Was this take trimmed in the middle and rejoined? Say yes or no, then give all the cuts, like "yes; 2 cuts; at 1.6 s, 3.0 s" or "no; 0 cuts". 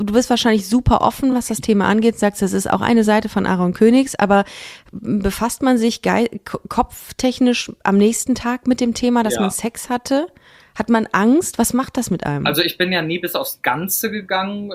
no; 0 cuts